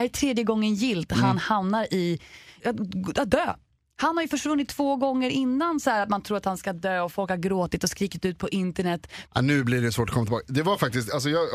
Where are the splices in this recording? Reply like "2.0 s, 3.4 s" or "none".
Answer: 2.6 s, 9.3 s

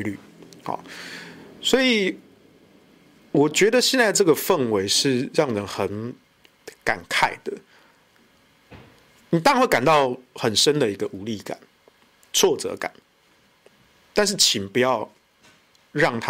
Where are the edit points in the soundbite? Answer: none

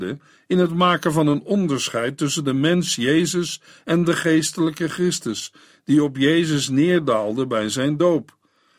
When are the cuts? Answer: none

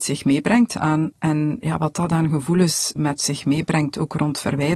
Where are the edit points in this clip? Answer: 1.1 s, 3.0 s

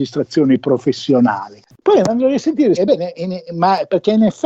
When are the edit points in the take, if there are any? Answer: 2.8 s

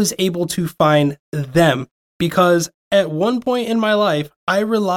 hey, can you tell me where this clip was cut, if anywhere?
none

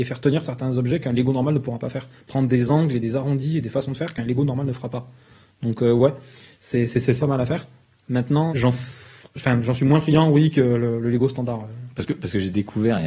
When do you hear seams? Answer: 7.2 s, 8.5 s

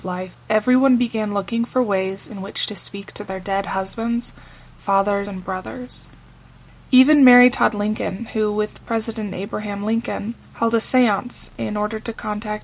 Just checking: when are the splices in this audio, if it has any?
5.3 s, 10.4 s

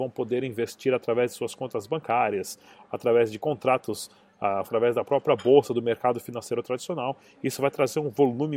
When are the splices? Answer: 4.6 s

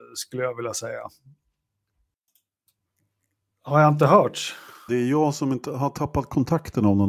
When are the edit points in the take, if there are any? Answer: 4.9 s

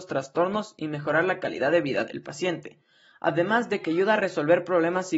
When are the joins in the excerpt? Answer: none

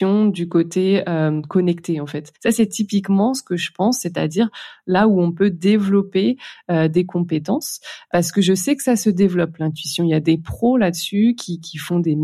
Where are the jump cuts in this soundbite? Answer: 2.4 s

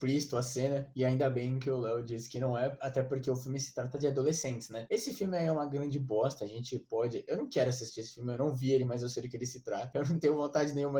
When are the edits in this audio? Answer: 0.9 s

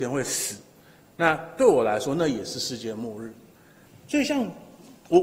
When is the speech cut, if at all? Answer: 3.9 s

